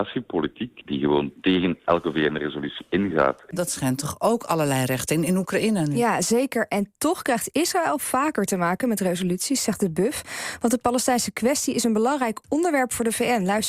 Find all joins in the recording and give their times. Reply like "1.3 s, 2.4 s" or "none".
3.5 s